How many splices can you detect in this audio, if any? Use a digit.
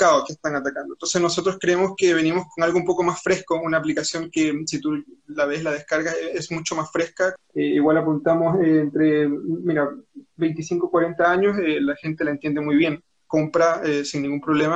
1